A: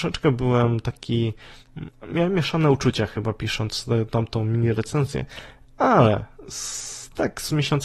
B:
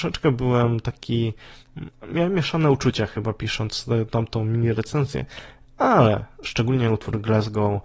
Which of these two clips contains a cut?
B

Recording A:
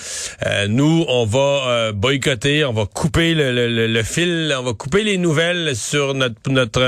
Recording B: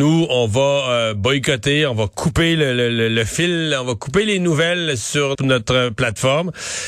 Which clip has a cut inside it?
B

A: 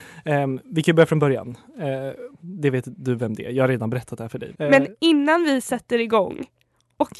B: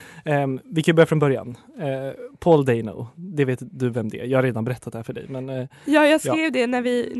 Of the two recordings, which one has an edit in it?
A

